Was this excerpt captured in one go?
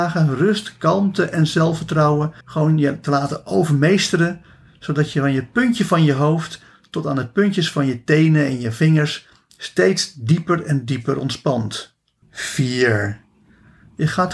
no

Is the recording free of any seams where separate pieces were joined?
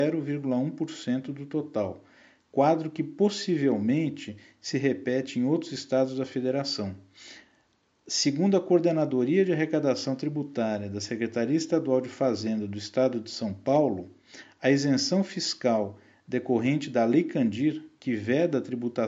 yes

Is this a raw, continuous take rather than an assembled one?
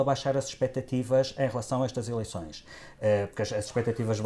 yes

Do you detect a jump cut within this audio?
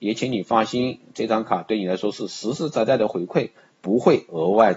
no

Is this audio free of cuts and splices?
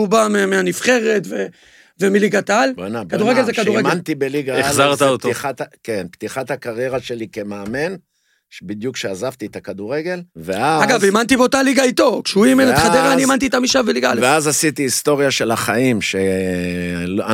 no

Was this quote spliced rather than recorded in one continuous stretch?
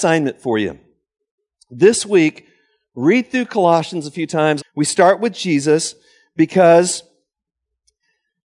yes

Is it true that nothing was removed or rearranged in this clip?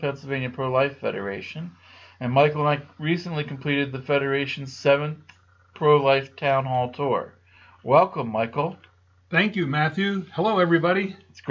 yes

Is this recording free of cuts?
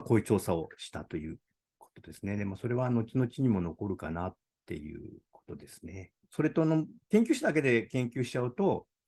yes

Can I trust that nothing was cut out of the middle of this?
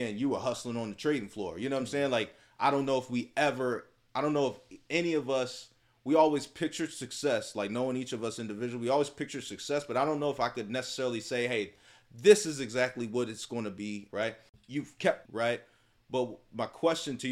no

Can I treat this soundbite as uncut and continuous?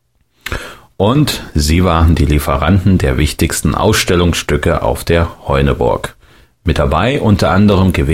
yes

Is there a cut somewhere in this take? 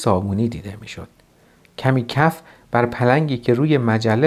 no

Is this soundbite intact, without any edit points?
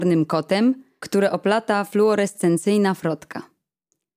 no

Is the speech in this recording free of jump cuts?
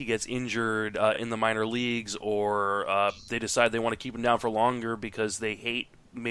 yes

